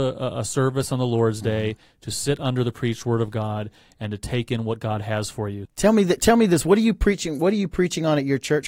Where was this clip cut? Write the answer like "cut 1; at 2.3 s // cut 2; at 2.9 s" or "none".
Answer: cut 1; at 5.6 s